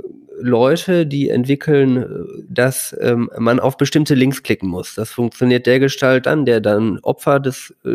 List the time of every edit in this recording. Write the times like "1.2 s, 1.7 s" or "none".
2.4 s, 6.2 s